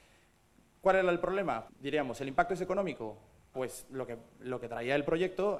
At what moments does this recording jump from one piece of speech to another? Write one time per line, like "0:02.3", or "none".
0:01.7
0:03.5